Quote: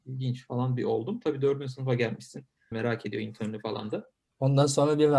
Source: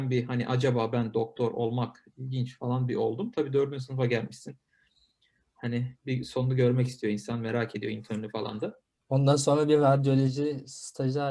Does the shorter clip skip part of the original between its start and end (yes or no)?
yes